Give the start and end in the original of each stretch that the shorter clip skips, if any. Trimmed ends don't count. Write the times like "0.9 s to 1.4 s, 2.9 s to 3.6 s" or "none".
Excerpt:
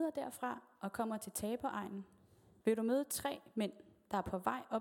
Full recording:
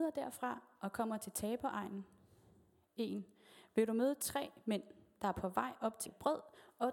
2.6 s to 3.7 s